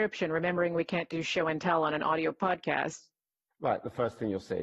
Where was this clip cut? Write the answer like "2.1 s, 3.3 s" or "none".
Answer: 3.5 s